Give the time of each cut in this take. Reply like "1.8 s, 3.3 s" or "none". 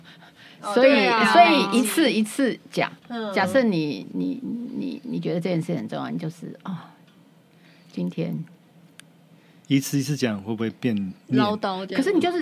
3.0 s